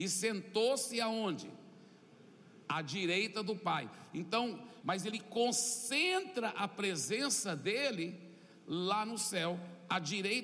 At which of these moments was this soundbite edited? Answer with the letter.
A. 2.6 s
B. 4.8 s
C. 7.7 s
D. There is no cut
B